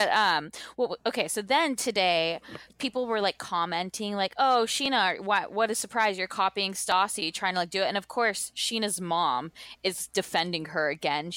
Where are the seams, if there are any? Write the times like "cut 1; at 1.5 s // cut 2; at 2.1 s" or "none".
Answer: cut 1; at 2.7 s